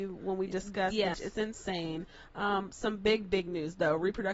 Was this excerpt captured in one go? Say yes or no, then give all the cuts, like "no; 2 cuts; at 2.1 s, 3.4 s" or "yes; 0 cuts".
no; 1 cut; at 1.1 s